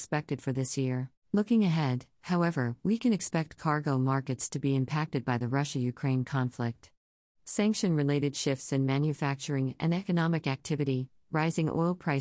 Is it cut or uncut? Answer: cut